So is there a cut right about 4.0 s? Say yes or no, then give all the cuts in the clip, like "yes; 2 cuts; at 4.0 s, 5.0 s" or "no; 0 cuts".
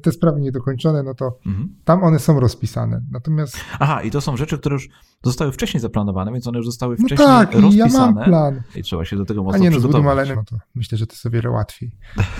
no; 2 cuts; at 8.7 s, 10.3 s